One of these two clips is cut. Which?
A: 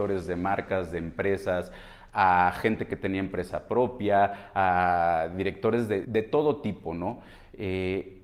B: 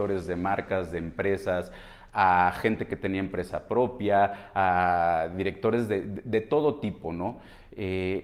A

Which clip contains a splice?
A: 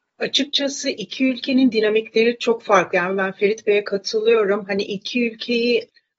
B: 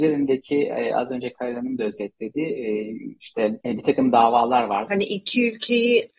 B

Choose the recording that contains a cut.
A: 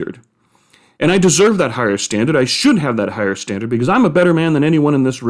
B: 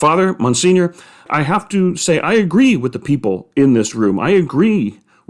A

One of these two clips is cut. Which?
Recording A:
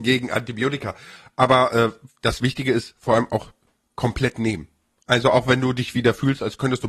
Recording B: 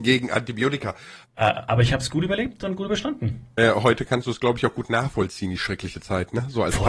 B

